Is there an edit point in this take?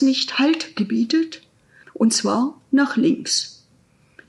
yes; 1 cut; at 1.8 s

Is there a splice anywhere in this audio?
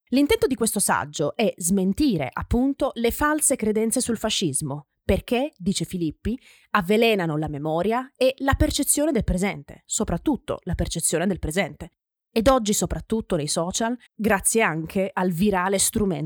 yes; 2 cuts; at 12.2 s, 14.1 s

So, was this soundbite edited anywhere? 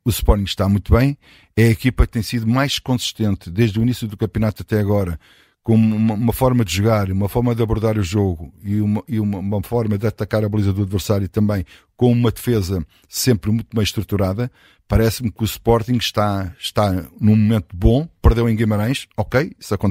no; 0 cuts

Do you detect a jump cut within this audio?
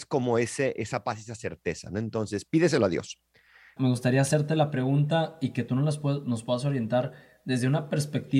yes; 1 cut; at 3.8 s

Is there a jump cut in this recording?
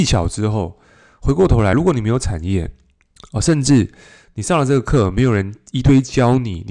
no; 0 cuts

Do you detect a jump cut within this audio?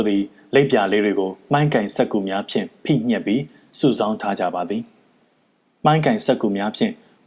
no; 0 cuts

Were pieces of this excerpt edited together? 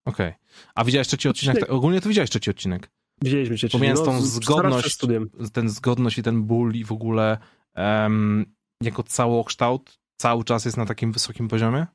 no; 0 cuts

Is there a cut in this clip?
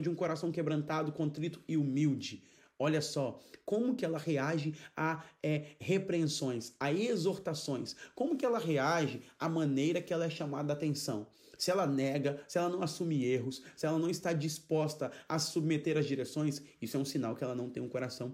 no; 0 cuts

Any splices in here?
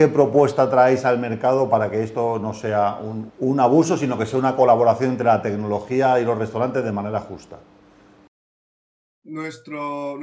yes; 1 cut; at 3.3 s

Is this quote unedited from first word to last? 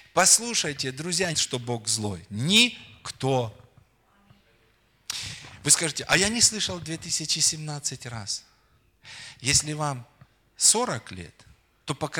no; 1 cut; at 1.3 s

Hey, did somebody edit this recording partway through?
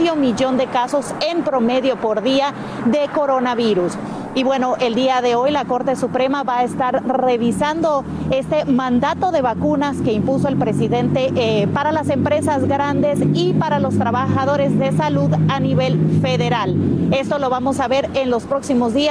yes; 1 cut; at 11.7 s

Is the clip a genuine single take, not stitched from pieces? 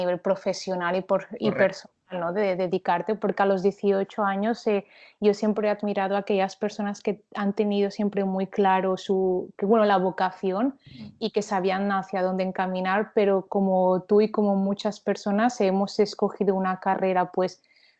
yes; 0 cuts

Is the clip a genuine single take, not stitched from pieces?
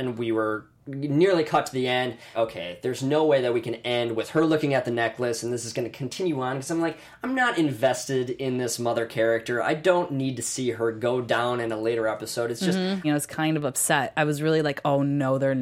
no; 2 cuts; at 2.3 s, 13.0 s

